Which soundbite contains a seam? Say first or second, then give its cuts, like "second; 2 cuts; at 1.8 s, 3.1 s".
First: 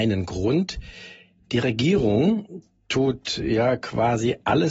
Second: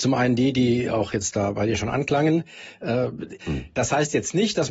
second; 1 cut; at 3.4 s